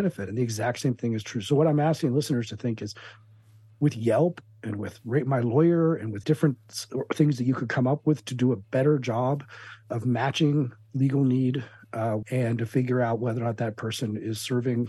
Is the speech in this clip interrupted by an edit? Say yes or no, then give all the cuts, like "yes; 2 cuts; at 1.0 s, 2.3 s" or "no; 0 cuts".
yes; 2 cuts; at 6.2 s, 12.2 s